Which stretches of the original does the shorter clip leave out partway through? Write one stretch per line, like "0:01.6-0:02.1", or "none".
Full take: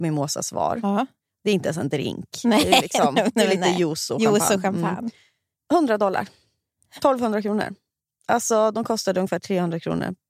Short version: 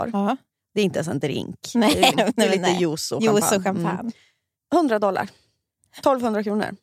0:02.8-0:03.1